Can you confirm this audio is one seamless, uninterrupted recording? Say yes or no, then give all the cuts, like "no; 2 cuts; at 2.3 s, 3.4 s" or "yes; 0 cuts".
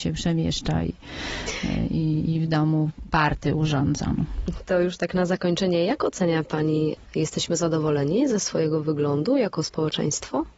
yes; 0 cuts